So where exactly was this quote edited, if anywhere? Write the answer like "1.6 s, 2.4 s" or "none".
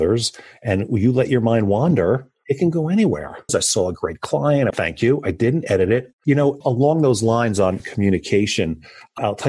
3.5 s, 4.7 s, 6.1 s

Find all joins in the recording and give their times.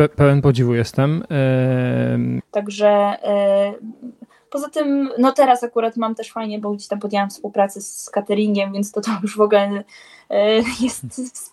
2.4 s, 6.6 s

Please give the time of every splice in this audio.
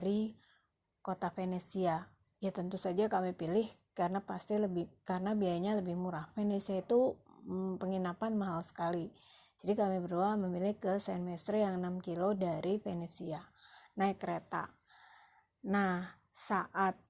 none

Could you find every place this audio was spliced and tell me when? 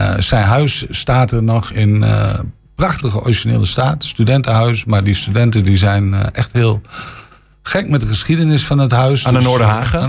none

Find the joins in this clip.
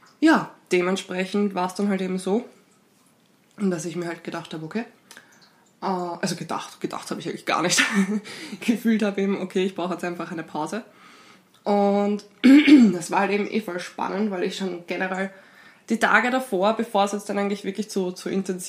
none

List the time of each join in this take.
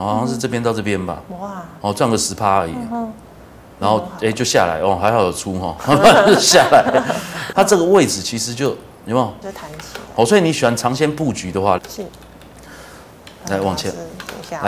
7.5 s, 9.4 s, 11.8 s

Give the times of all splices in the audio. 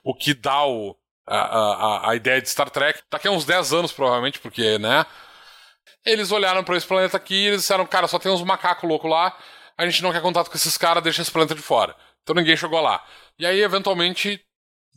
3.0 s, 5.9 s

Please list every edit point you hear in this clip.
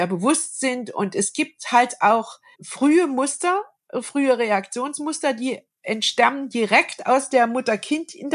none

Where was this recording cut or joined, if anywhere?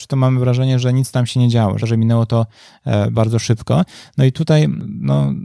1.8 s, 3.1 s

